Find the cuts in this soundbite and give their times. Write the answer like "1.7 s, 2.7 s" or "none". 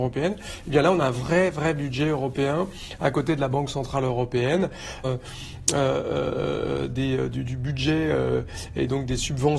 5.0 s

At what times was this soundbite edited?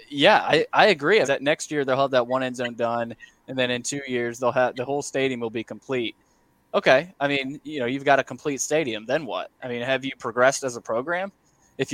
1.2 s

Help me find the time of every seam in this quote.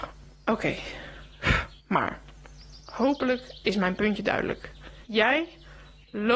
1.8 s, 5.0 s

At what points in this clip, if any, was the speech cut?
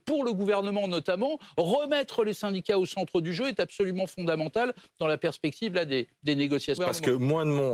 6.8 s

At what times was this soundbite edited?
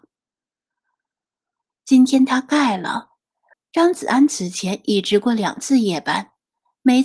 1.7 s, 3.5 s

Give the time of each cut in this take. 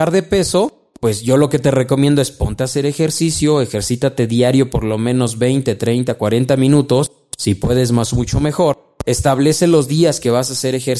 none

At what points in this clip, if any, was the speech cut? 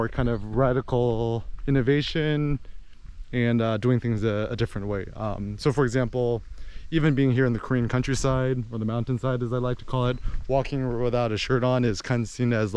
none

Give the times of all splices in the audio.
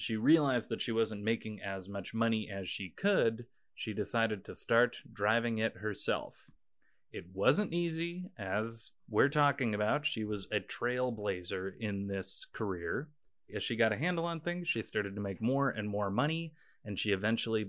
none

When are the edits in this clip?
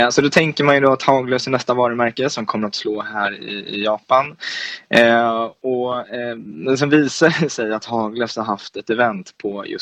none

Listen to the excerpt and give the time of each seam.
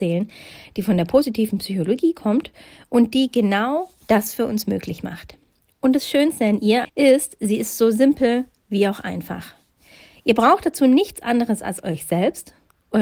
6.8 s

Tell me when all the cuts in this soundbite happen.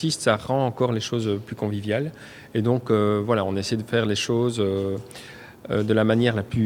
none

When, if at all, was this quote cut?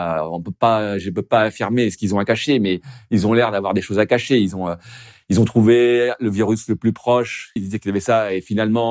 7.6 s

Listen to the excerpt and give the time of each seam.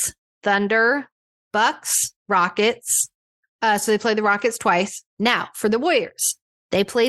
2.2 s, 5.1 s

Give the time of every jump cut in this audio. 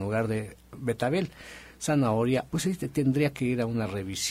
2.5 s

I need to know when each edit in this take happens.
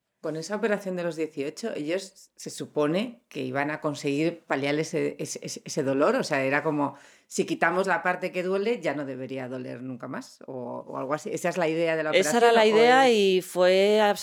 none

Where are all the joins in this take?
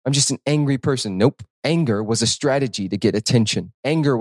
none

